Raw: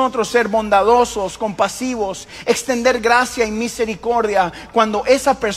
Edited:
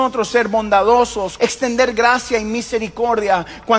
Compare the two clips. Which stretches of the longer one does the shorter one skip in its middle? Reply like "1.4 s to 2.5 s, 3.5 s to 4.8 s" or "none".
1.4 s to 2.4 s